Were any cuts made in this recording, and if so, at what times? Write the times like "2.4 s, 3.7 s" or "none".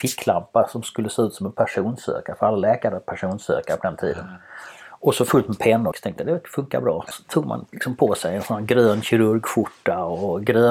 5.9 s, 7.1 s